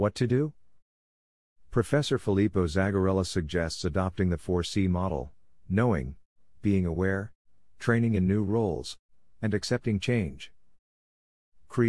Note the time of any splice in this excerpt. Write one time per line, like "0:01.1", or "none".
none